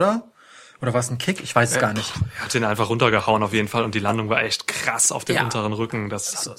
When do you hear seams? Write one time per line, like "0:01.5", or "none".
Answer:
none